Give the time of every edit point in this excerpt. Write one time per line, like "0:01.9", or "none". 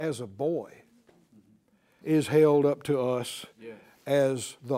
0:02.0